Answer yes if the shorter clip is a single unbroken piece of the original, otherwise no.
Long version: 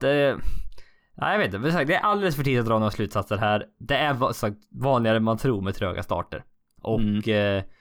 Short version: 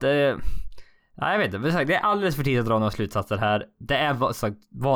yes